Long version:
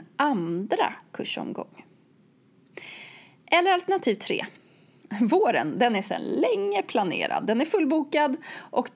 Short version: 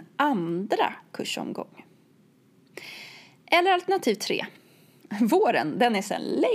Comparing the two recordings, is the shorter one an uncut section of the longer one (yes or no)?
yes